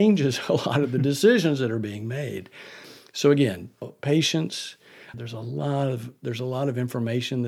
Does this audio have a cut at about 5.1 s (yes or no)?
yes